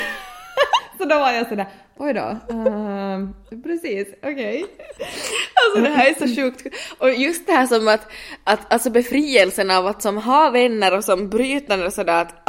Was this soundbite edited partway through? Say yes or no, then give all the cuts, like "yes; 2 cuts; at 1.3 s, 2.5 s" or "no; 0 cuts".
no; 0 cuts